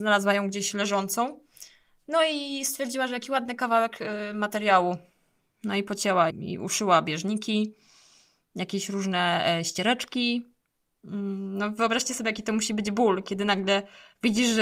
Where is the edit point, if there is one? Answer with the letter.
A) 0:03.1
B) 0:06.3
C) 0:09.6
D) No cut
B